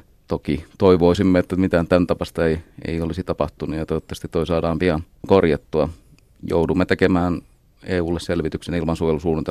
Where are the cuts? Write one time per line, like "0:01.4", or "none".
none